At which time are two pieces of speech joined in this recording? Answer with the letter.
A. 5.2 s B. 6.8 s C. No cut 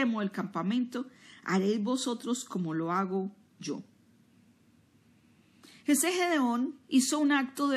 B